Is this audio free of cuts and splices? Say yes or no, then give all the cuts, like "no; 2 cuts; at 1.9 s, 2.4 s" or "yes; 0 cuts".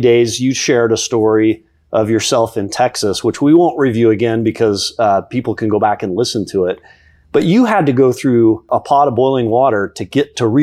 yes; 0 cuts